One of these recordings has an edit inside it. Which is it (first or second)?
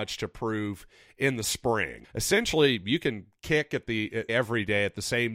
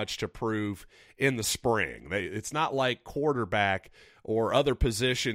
first